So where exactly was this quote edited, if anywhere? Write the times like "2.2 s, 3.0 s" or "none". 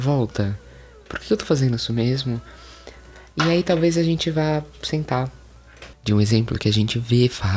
5.9 s